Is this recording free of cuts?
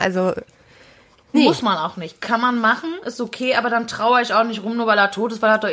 no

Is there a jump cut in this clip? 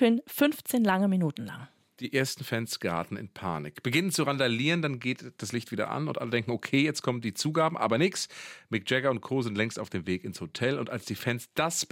no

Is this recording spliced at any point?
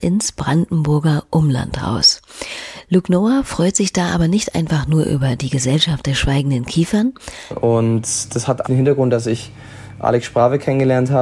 yes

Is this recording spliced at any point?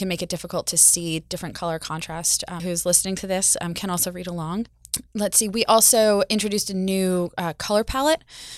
yes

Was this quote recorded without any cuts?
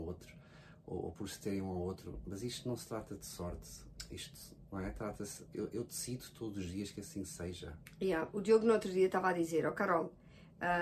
yes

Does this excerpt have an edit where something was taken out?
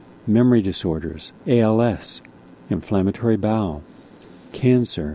yes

